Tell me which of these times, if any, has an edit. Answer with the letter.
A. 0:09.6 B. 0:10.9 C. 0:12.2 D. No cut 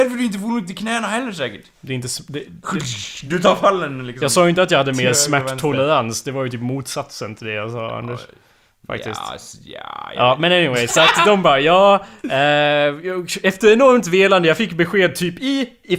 B